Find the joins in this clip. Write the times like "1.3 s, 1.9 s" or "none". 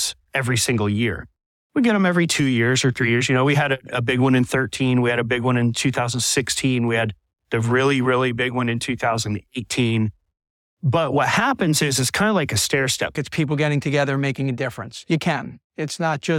13.1 s